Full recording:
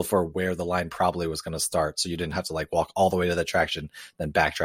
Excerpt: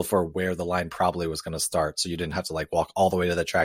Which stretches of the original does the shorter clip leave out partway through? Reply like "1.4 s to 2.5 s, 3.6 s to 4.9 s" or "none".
none